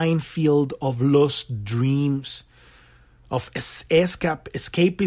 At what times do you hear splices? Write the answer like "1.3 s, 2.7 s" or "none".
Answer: none